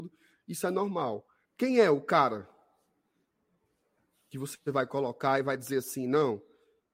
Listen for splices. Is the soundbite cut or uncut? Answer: cut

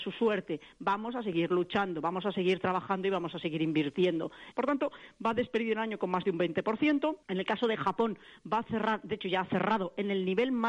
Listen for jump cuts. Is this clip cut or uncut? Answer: cut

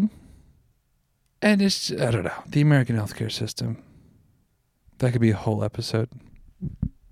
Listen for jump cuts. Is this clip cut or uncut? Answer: uncut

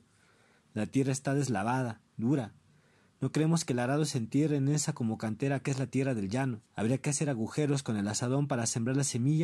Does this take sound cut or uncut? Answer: cut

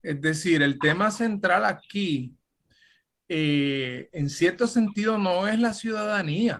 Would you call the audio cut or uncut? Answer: uncut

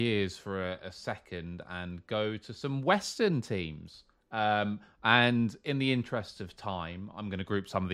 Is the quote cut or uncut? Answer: uncut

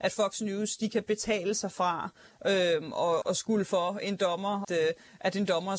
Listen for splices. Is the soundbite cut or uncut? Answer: cut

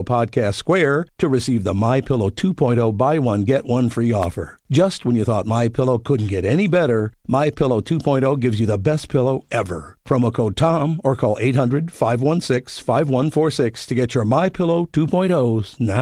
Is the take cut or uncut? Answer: uncut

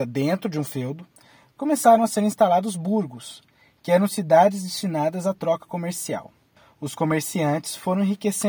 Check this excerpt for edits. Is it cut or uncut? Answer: uncut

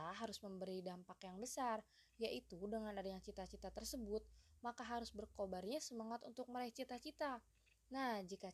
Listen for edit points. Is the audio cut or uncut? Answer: uncut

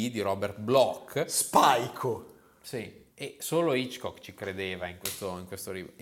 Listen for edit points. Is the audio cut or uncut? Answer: uncut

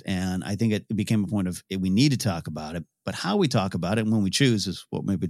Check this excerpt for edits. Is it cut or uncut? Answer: uncut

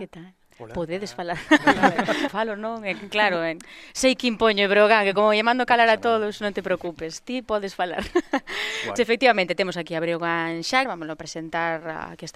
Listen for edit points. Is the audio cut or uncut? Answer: cut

